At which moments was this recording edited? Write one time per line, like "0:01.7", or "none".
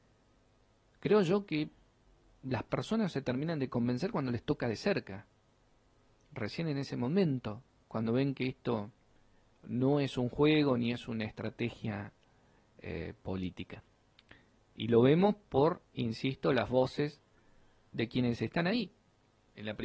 none